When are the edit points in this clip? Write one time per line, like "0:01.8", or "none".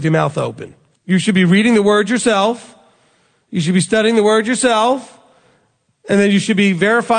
0:00.9